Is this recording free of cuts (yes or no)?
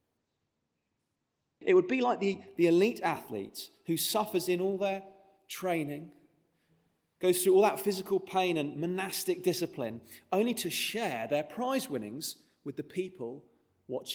no